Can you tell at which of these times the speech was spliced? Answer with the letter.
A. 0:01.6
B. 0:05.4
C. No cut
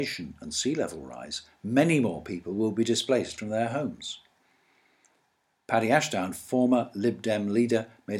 A